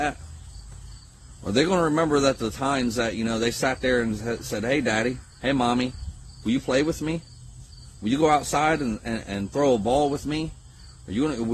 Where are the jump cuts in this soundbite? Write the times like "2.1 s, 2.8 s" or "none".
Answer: 5.3 s, 9.2 s